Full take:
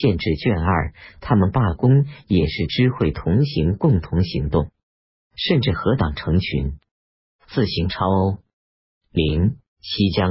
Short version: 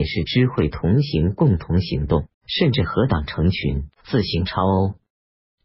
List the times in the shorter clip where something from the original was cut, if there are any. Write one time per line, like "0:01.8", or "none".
0:02.3
0:03.9